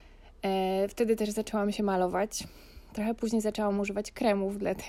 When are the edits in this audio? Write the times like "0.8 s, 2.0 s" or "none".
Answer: none